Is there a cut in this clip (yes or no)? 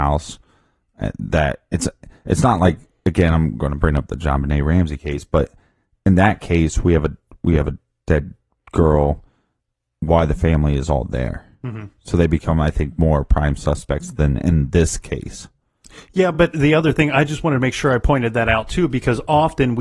no